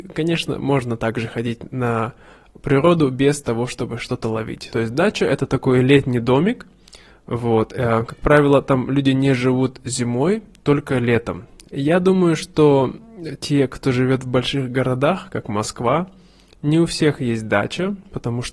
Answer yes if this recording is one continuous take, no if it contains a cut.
no